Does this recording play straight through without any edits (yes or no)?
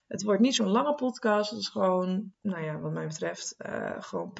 no